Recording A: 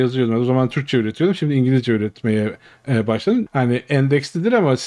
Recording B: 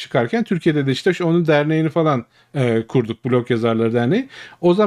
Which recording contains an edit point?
A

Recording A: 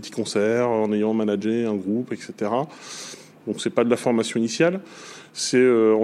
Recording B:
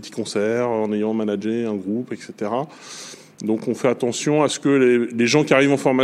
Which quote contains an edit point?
A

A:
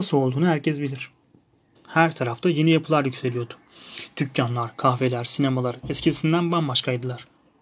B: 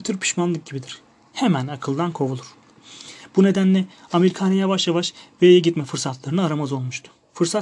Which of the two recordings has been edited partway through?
A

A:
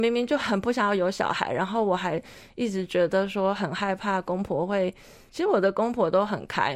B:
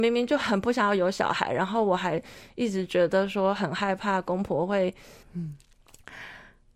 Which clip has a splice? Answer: B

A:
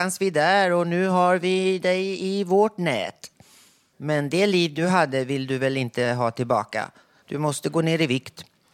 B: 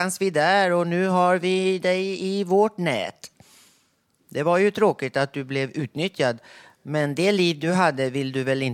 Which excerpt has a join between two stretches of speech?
A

